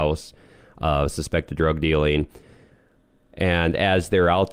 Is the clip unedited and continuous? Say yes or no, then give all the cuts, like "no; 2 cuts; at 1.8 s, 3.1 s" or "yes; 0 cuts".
yes; 0 cuts